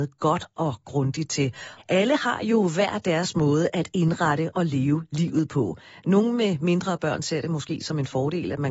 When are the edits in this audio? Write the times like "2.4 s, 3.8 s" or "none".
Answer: 1.8 s